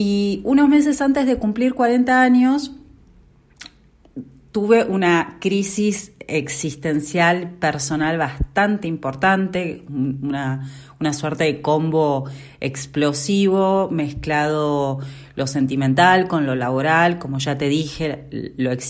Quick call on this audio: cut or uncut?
uncut